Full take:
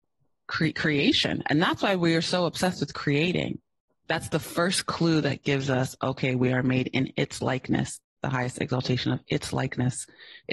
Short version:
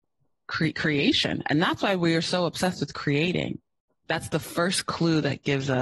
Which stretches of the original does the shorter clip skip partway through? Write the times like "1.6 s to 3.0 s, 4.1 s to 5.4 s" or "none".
none